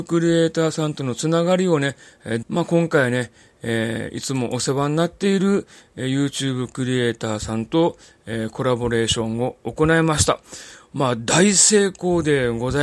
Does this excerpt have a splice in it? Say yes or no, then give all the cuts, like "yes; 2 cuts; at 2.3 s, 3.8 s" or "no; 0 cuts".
yes; 1 cut; at 2.4 s